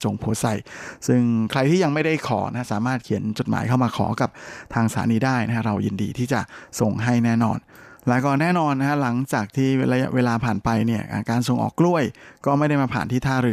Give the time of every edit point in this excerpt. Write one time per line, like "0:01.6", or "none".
0:11.7